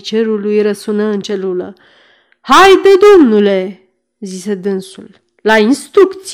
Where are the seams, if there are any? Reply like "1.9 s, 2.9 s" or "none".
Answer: none